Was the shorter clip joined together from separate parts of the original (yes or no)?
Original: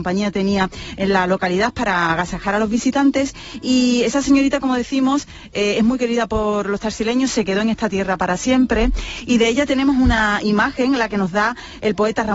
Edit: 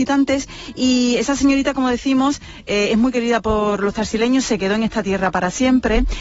no